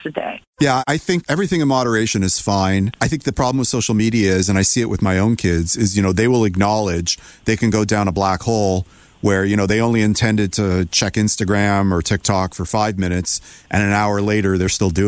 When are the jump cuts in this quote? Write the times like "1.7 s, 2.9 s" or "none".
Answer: 3.0 s